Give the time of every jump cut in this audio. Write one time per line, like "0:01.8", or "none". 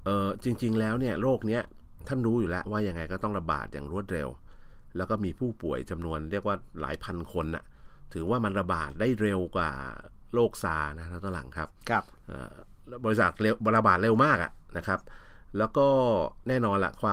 0:02.6